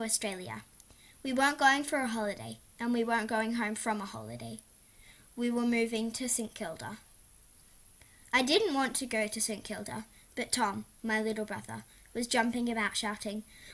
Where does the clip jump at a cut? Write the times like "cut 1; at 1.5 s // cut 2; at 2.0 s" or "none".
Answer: none